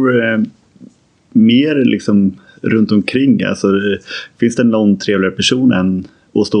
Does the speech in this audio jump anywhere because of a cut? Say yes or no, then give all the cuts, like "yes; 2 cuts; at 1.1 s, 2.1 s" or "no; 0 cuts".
no; 0 cuts